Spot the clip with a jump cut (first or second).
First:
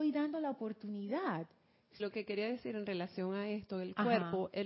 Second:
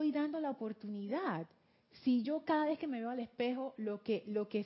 first